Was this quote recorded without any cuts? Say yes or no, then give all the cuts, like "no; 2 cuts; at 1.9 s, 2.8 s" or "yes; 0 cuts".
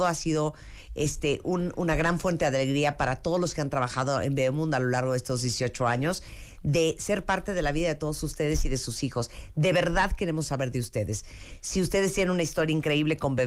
yes; 0 cuts